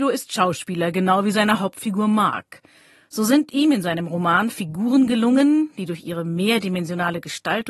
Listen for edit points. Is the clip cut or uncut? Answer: uncut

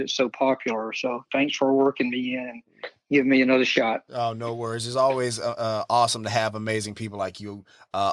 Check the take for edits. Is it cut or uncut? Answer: uncut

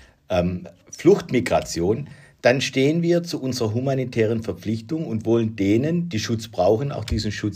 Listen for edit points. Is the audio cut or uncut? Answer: uncut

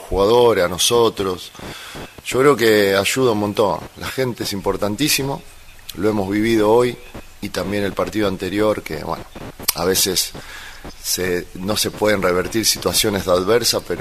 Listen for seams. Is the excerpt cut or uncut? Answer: uncut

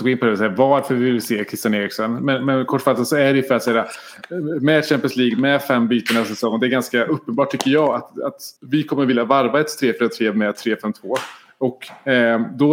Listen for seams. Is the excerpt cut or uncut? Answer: cut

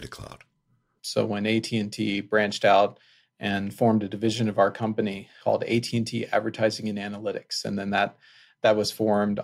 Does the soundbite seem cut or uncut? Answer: cut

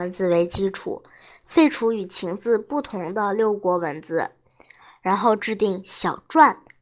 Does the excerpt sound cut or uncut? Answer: uncut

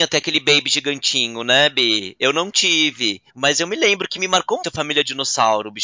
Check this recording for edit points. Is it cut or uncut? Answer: cut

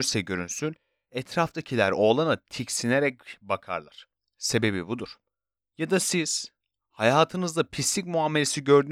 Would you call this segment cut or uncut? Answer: cut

